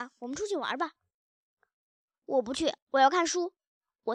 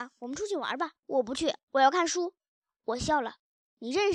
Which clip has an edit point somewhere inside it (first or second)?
second